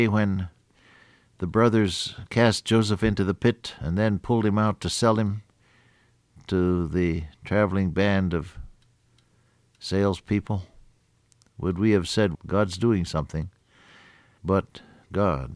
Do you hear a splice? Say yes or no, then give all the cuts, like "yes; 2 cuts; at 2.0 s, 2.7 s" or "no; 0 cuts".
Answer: yes; 2 cuts; at 12.3 s, 14.4 s